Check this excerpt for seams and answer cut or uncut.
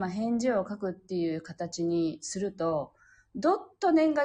uncut